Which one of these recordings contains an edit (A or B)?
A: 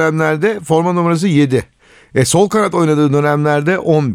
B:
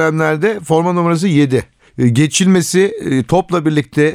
B